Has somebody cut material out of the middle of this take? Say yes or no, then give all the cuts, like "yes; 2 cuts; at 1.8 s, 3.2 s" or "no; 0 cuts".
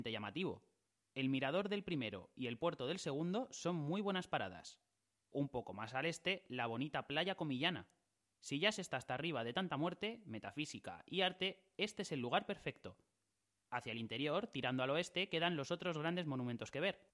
no; 0 cuts